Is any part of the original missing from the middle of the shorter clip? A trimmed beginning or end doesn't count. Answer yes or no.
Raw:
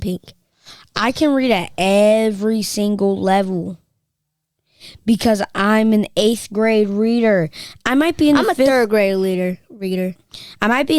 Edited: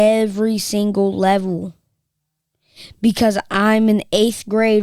no